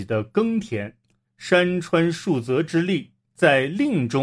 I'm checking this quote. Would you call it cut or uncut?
cut